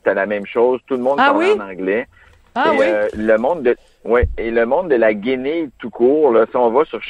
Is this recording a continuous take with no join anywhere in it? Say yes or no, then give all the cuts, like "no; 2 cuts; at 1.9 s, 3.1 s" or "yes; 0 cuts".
yes; 0 cuts